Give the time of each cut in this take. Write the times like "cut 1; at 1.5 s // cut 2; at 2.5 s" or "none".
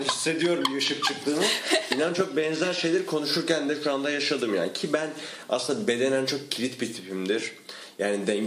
none